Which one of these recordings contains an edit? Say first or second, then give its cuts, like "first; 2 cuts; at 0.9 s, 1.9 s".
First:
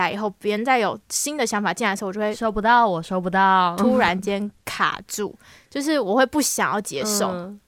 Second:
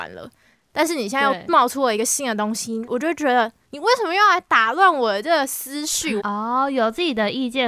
second; 1 cut; at 6.2 s